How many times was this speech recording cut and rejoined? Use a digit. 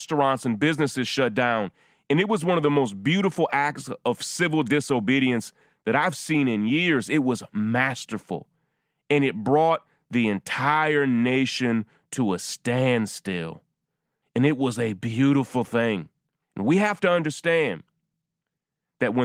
2